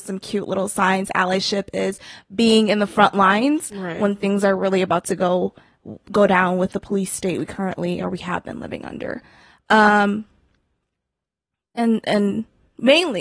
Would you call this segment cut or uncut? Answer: cut